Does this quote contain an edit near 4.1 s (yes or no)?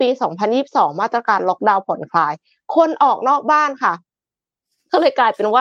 no